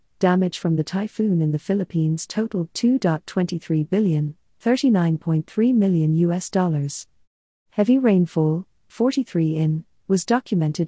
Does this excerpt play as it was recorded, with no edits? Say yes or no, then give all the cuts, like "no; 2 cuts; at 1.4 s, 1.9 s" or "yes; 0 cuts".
no; 1 cut; at 8.8 s